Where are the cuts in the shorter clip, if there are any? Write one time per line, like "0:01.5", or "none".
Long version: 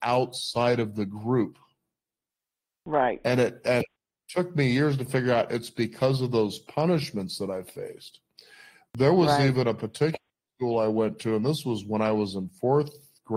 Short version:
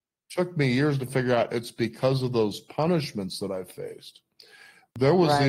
none